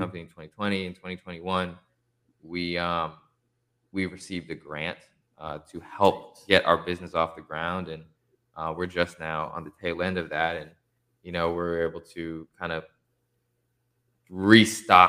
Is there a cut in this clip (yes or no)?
no